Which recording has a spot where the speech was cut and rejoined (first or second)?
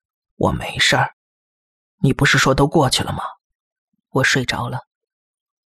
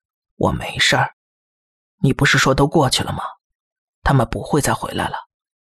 first